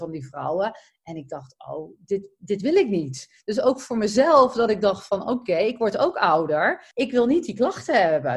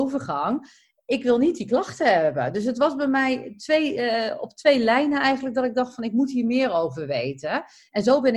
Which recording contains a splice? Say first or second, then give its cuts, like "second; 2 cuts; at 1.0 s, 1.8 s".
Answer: first; 1 cut; at 6.9 s